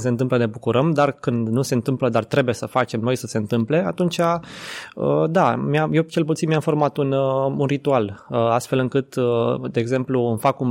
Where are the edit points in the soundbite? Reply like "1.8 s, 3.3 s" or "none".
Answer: none